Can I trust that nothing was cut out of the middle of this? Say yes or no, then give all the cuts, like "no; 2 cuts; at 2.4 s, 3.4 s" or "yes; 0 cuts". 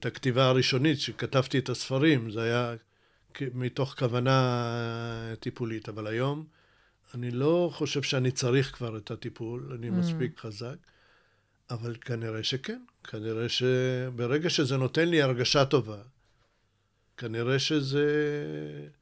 no; 1 cut; at 10.4 s